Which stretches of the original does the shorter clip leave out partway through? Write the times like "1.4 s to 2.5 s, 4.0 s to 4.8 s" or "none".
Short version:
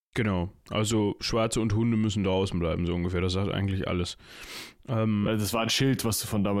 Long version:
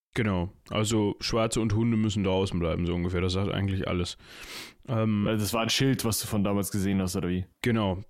none